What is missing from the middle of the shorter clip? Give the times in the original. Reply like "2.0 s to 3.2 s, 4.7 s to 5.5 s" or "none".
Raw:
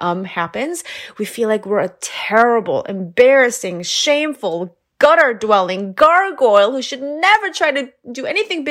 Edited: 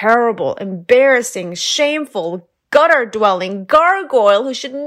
none